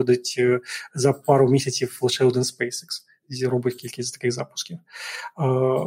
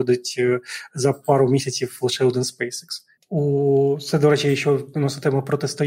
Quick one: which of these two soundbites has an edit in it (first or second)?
second